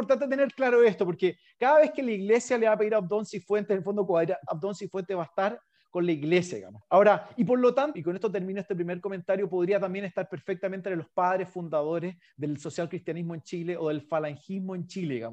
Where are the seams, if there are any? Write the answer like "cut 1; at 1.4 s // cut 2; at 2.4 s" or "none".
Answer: cut 1; at 4.5 s // cut 2; at 6.8 s // cut 3; at 7.9 s